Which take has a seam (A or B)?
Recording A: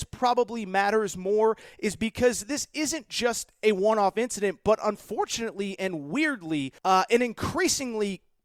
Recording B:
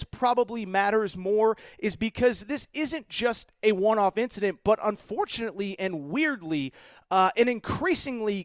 A